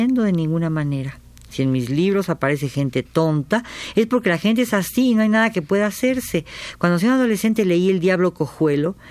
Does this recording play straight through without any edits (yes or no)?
no